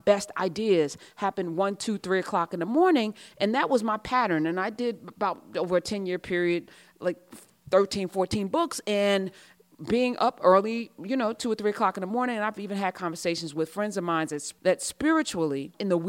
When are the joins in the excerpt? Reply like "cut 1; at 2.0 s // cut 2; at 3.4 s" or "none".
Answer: none